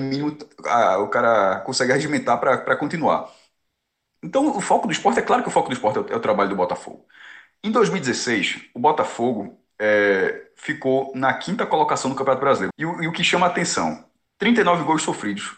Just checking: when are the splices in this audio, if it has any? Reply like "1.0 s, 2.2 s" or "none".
12.7 s